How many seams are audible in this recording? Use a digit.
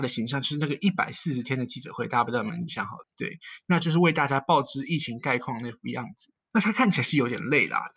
2